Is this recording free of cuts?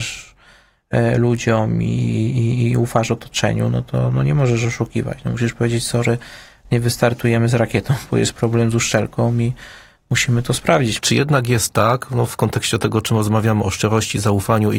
no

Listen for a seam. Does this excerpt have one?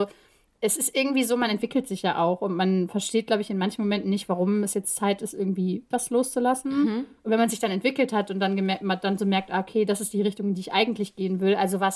yes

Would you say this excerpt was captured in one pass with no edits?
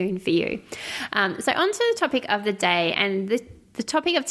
yes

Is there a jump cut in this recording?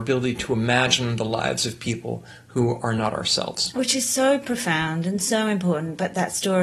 no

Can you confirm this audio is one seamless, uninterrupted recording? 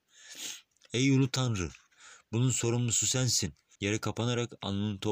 no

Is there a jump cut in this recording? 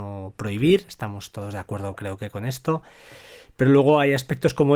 no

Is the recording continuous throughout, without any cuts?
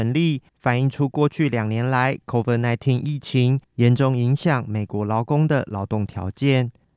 yes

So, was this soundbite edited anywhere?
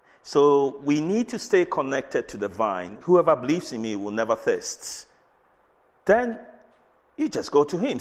yes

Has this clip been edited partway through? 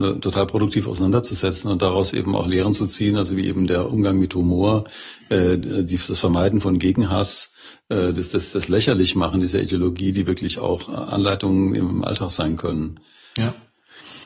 no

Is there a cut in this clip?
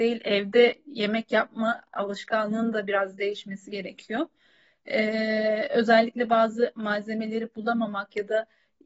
no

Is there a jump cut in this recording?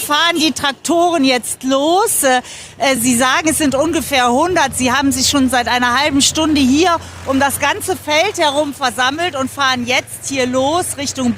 no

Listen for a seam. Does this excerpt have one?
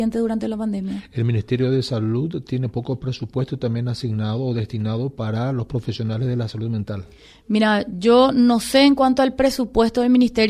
no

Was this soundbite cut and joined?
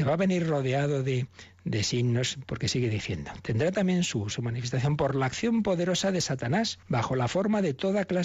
yes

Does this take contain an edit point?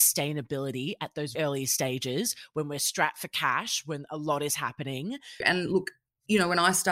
yes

